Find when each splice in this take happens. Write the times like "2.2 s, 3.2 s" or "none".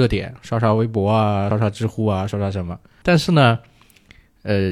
1.5 s, 3.0 s